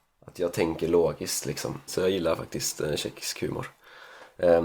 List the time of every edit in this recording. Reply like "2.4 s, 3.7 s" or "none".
1.9 s